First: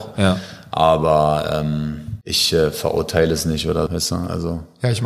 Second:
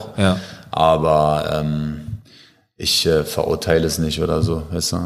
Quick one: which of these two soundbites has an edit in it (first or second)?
first